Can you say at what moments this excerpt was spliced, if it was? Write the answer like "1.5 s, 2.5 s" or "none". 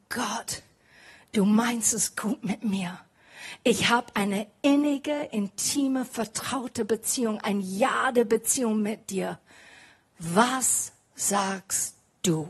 none